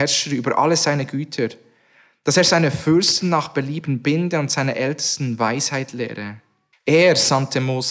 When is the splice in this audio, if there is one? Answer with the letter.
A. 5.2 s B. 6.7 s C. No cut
B